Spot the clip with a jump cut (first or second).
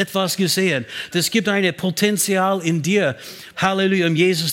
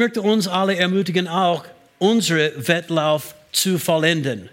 first